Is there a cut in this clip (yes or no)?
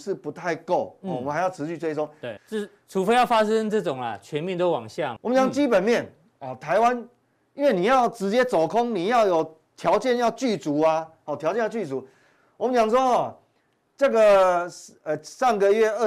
yes